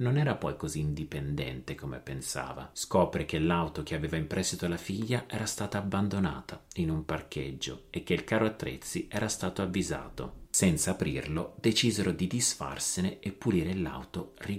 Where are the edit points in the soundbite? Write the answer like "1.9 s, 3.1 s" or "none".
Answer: 2.7 s, 10.5 s